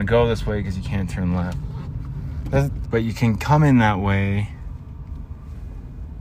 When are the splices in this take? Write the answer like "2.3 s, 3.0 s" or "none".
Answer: 2.8 s